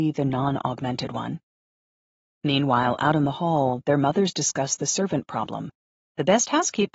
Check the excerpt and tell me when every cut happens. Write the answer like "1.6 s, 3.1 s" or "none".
none